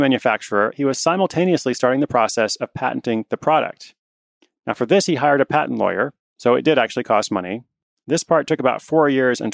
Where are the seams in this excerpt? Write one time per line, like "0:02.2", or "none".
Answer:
none